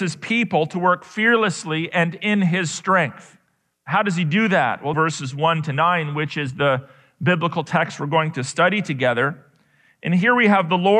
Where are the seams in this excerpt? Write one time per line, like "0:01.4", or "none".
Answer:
0:04.9